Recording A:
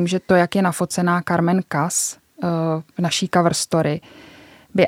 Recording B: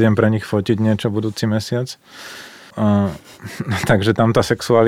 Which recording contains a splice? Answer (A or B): B